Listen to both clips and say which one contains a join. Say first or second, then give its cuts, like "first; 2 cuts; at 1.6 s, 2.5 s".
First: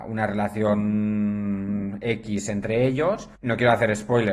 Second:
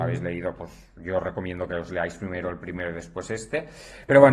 first; 1 cut; at 3.4 s